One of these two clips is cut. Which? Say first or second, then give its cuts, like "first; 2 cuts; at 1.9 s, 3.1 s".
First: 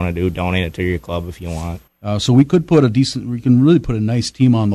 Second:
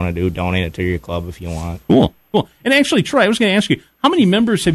first; 1 cut; at 1.9 s